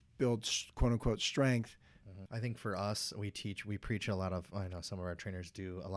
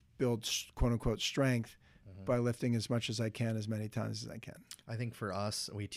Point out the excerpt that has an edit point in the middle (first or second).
first